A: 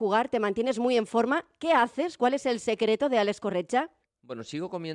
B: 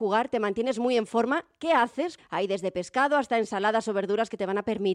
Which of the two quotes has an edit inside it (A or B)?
B